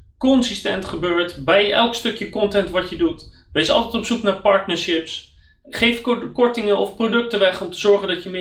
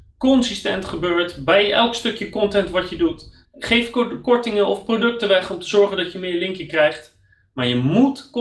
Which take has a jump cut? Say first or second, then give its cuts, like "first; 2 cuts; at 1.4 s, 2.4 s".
second; 1 cut; at 3.5 s